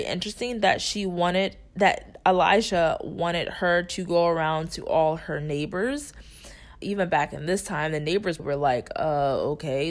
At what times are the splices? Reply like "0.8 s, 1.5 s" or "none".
6.8 s, 8.4 s